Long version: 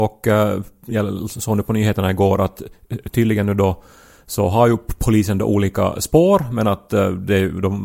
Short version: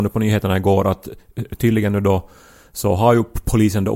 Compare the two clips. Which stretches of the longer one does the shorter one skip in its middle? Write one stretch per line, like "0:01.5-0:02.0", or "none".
none